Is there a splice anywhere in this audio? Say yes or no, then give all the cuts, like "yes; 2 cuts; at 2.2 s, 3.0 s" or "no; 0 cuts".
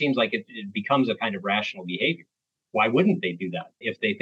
no; 0 cuts